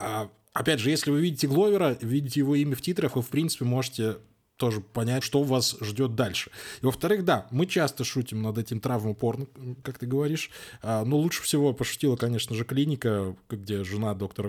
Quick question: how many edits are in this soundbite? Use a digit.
1